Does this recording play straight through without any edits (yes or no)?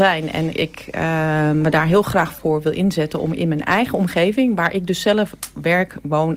yes